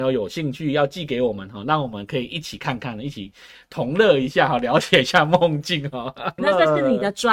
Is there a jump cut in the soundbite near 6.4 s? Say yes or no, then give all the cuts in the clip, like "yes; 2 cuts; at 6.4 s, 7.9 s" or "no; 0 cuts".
yes; 1 cut; at 6.4 s